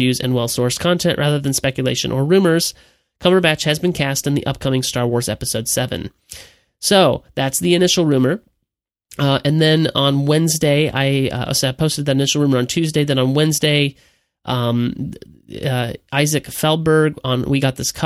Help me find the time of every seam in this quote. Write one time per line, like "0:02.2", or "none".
none